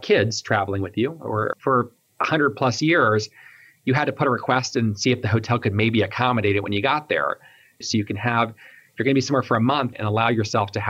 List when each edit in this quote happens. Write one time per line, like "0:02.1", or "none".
0:01.5
0:07.8
0:09.9